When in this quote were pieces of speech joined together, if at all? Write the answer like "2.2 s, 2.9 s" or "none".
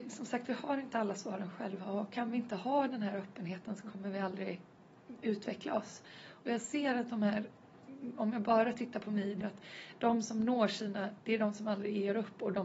9.4 s, 11.2 s

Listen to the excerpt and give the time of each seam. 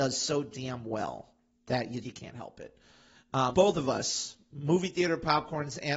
2.0 s, 3.5 s

